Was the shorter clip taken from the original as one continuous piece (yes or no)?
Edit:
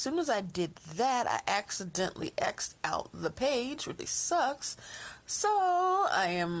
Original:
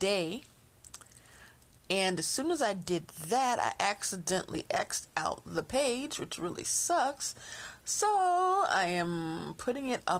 no